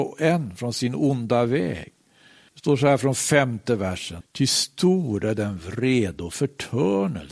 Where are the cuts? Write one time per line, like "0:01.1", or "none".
0:02.5
0:04.2

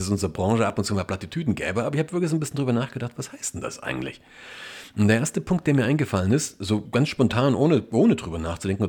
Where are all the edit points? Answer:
0:06.9

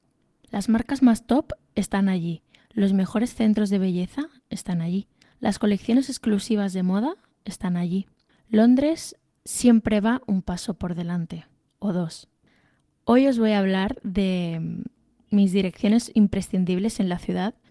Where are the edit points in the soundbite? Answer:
none

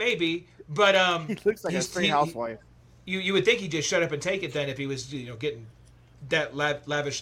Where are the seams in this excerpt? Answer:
none

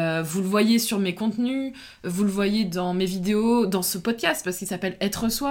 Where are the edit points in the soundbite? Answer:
none

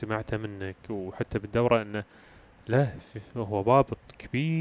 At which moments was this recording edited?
none

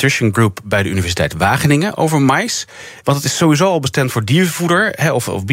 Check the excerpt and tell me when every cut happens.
0:03.0

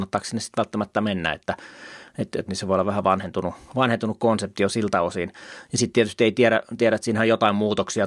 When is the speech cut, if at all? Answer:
0:02.5

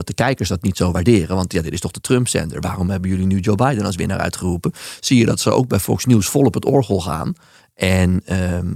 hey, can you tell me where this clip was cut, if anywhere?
none

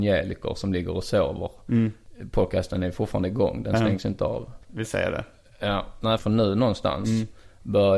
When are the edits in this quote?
0:04.6
0:06.2

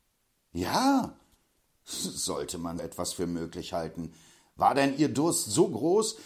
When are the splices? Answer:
0:02.8

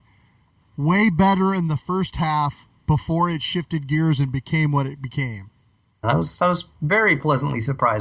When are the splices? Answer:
0:06.0

